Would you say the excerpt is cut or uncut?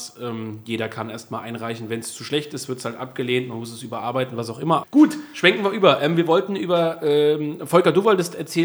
cut